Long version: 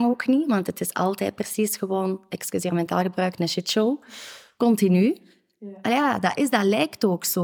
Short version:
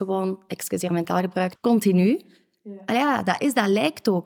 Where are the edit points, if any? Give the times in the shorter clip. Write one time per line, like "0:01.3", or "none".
0:01.6